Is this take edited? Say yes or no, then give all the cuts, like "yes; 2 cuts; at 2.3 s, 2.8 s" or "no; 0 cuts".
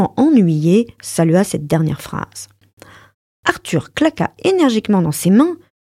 no; 0 cuts